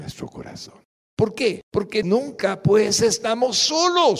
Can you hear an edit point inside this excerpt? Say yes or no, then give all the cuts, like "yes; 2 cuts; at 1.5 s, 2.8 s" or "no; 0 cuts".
yes; 1 cut; at 1.1 s